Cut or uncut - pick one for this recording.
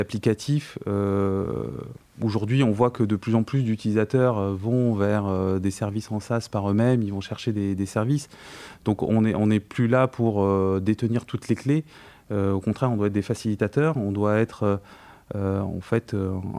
uncut